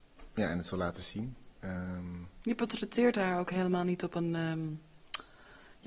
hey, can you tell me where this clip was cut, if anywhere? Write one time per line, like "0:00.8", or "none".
none